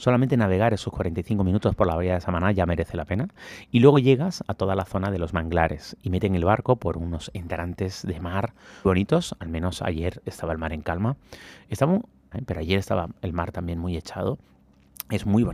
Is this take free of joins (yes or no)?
no